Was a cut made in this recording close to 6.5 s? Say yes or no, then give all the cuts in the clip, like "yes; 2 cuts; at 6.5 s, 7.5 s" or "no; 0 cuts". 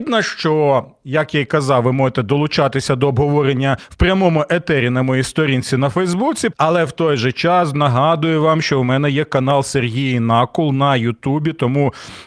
yes; 2 cuts; at 6.5 s, 7.7 s